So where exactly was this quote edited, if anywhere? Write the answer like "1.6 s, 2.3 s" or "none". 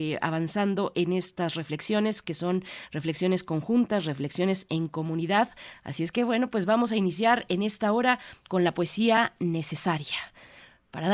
none